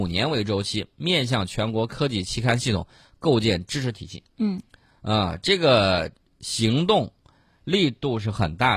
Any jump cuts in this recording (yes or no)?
no